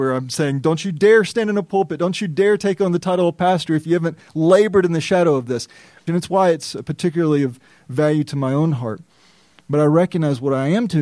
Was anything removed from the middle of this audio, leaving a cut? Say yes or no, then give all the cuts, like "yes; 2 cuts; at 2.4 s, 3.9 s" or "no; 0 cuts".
yes; 1 cut; at 6.1 s